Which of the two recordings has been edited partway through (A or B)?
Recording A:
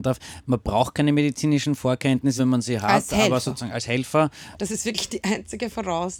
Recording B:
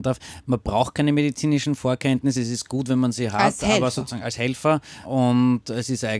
A